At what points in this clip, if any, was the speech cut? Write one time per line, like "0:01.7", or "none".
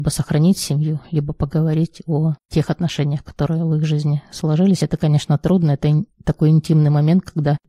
none